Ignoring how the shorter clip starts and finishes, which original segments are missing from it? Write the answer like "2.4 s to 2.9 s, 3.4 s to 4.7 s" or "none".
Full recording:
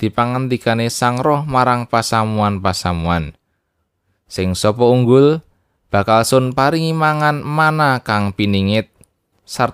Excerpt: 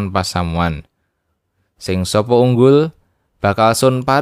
none